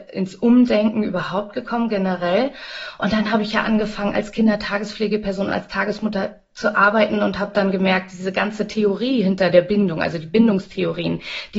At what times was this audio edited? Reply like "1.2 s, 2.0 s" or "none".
none